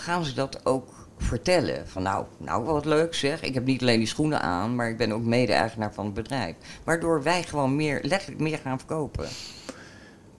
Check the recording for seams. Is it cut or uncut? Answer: uncut